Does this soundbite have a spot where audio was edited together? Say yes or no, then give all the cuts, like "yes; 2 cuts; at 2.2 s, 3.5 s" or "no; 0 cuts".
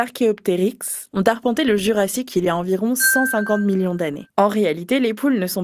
yes; 2 cuts; at 1.1 s, 4.3 s